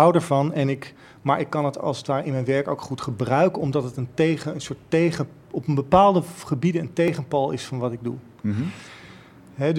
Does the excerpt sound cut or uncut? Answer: uncut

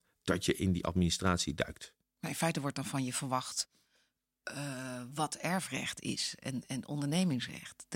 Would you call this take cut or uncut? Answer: uncut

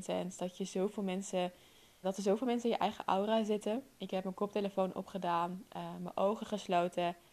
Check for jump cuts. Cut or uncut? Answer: cut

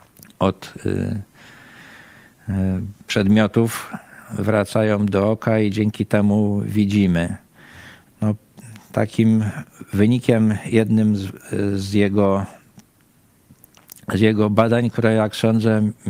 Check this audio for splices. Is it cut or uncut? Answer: cut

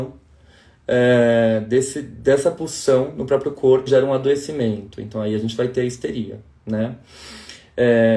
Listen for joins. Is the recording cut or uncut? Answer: cut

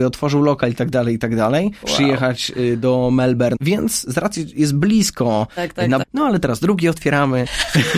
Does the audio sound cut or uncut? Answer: cut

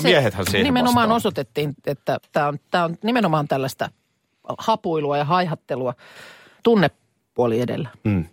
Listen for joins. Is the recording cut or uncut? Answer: cut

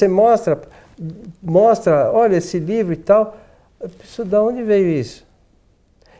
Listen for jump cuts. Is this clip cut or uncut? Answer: uncut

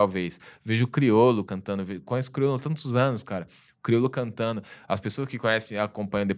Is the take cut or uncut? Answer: uncut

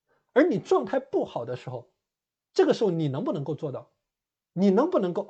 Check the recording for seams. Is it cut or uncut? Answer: uncut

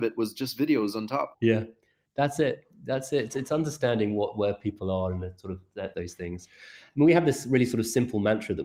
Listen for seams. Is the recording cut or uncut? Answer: cut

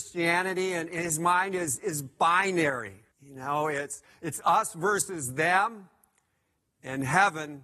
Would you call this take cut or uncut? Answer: cut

